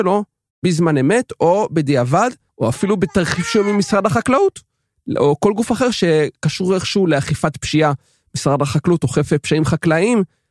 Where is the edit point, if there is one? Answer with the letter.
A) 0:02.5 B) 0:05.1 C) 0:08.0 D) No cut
A